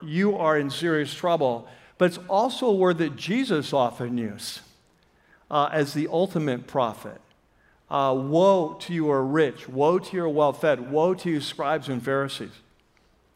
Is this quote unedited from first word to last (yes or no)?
yes